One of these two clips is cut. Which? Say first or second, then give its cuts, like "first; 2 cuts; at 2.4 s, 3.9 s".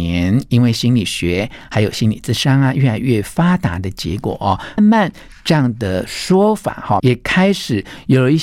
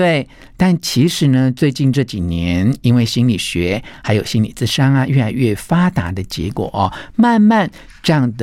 first; 2 cuts; at 4.8 s, 7.0 s